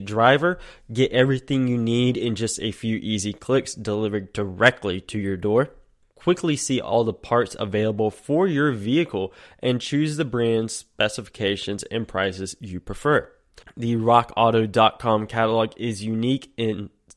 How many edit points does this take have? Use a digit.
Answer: 2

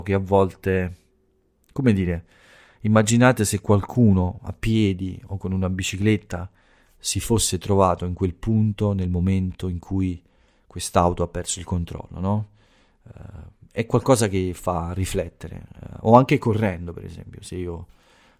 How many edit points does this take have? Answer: 0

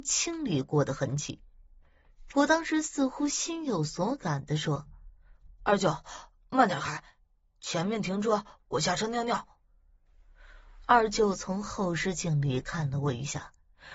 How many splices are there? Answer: 1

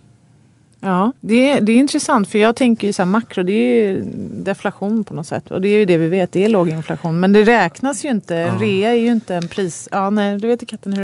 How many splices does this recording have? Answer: 1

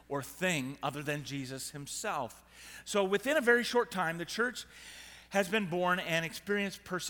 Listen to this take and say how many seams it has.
0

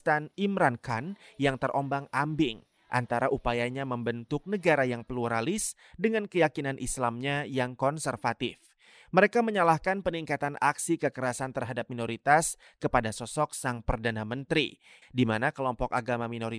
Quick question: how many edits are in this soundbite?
1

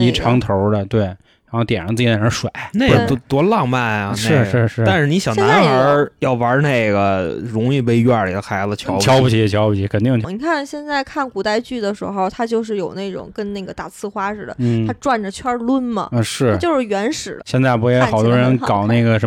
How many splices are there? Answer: 2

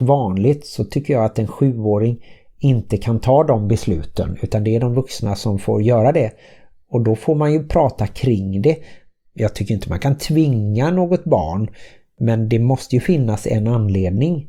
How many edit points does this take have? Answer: 0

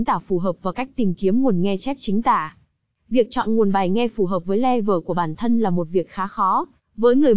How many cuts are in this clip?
0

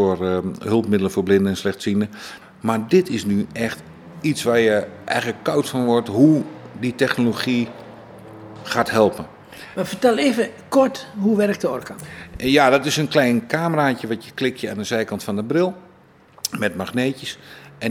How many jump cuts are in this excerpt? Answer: 1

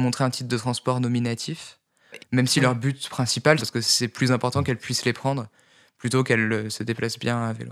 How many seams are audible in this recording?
2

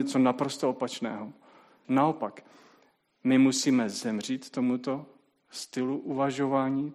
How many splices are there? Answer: 1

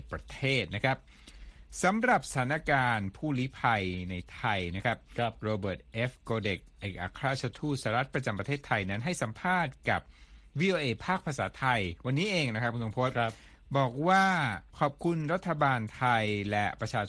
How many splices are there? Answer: 1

